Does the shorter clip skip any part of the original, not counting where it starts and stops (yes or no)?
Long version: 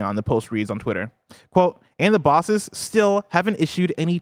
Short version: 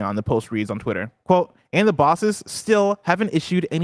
yes